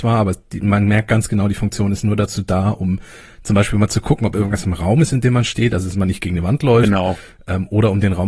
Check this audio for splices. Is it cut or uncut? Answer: uncut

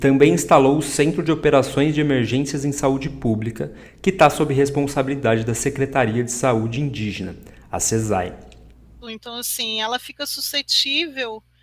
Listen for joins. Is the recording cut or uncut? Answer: cut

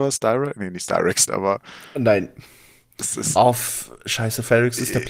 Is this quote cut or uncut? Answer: cut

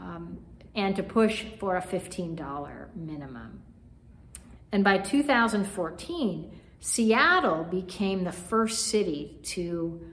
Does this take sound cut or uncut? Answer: cut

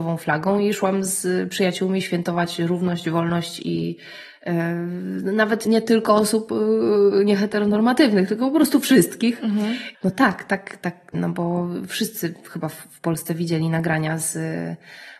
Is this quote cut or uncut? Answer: cut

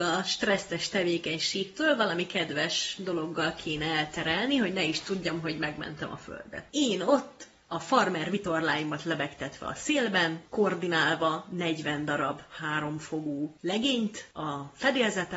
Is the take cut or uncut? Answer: cut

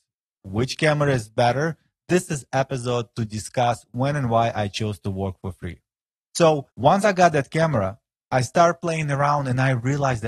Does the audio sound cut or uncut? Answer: cut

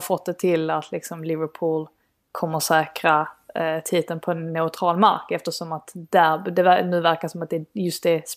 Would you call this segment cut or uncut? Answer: uncut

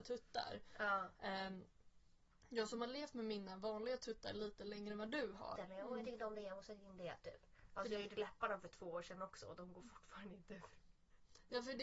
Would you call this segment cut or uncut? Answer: cut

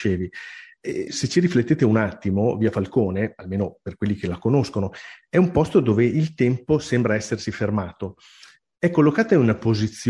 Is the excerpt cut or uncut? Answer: cut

